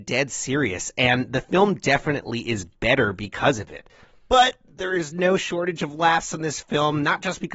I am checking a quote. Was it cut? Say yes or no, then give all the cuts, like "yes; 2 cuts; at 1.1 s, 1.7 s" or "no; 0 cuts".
no; 0 cuts